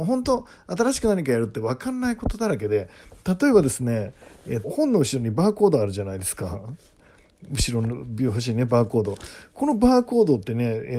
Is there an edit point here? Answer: yes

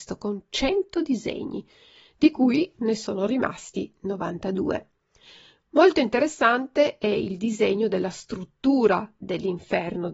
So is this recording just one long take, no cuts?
yes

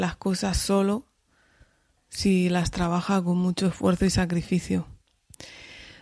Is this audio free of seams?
yes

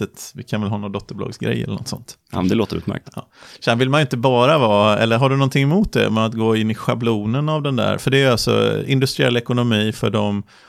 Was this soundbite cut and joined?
no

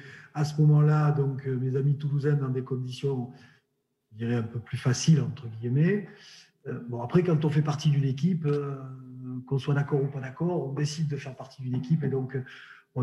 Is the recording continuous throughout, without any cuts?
yes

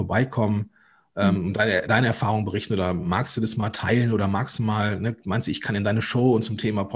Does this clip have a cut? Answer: no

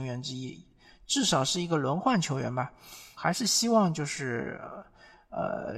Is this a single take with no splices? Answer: no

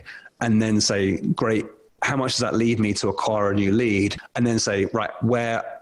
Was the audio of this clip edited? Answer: no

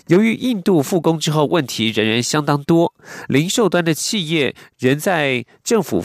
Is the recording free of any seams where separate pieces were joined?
yes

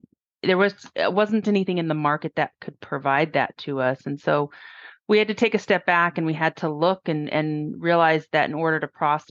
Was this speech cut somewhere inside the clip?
no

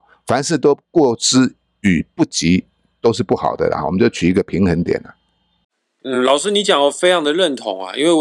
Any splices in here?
no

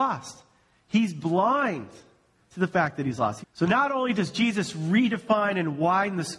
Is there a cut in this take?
yes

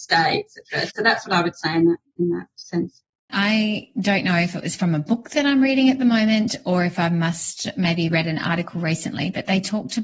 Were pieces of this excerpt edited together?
yes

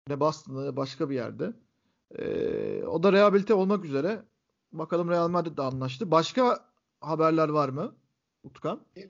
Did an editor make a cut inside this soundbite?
no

